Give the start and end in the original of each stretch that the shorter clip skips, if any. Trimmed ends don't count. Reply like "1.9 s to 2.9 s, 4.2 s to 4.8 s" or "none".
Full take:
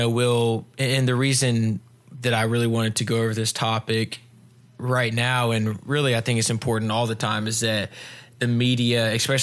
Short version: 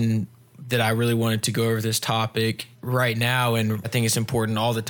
4.3 s to 4.7 s, 5.8 s to 6.2 s